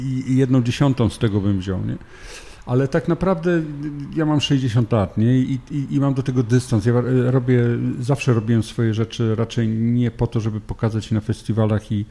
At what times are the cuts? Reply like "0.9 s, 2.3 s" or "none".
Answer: none